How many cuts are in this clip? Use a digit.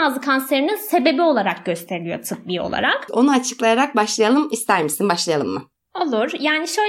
1